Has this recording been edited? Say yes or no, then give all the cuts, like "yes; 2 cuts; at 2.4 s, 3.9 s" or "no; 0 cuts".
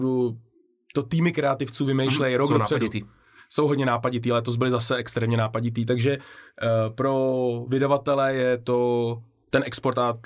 no; 0 cuts